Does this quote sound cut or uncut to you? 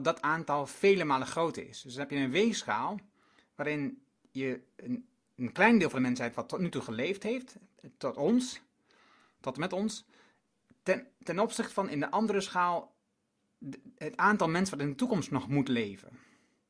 uncut